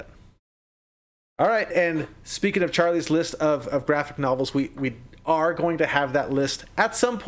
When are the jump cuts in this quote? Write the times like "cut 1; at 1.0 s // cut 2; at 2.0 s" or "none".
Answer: cut 1; at 1.7 s